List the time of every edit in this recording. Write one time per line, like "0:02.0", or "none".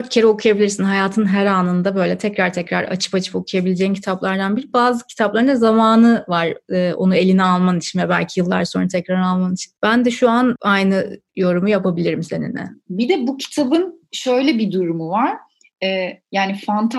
none